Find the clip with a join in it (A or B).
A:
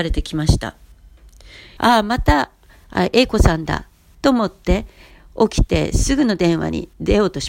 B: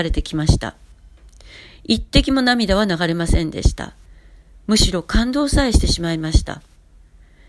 A